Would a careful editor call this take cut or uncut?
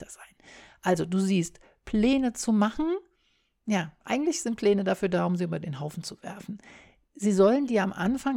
uncut